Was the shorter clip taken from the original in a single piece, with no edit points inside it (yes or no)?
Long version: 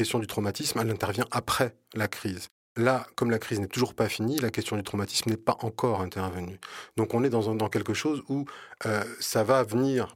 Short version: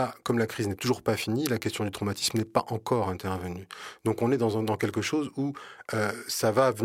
yes